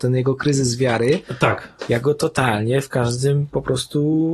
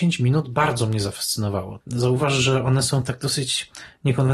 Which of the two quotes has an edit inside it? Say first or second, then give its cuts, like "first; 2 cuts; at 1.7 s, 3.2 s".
second; 1 cut; at 1.8 s